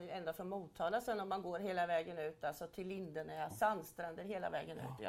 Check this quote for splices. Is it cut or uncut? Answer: cut